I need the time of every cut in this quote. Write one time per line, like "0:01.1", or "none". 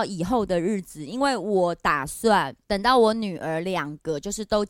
0:02.6

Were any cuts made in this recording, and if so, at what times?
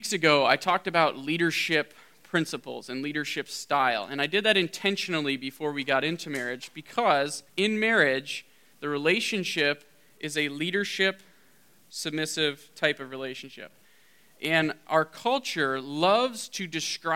0:07.5

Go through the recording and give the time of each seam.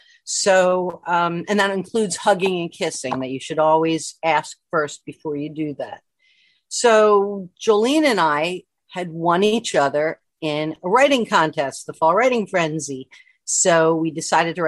none

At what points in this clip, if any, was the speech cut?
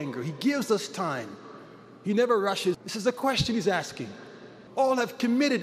0:02.7
0:04.7

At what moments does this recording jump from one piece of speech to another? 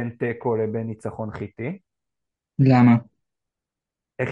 none

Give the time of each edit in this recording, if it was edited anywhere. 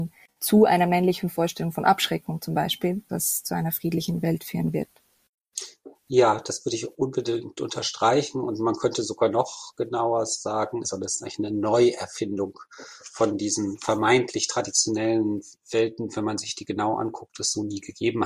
0:03.1
0:10.8

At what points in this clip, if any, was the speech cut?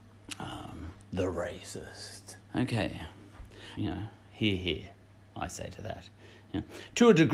0:02.4
0:03.8

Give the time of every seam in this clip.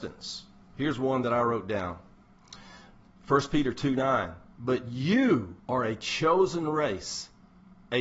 0:04.5
0:05.6

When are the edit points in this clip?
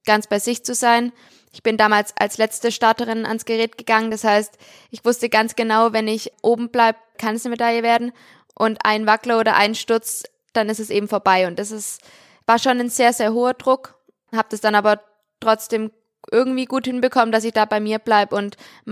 none

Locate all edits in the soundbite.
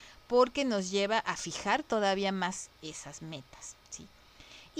none

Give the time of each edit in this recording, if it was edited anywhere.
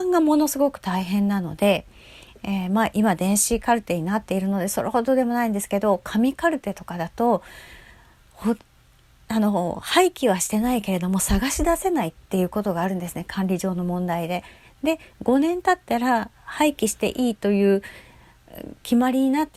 none

